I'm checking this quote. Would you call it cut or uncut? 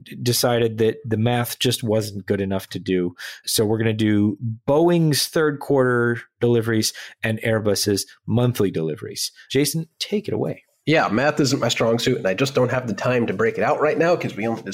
uncut